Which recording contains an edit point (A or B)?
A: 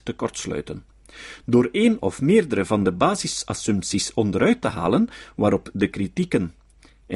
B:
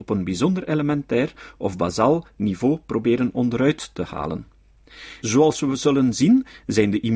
B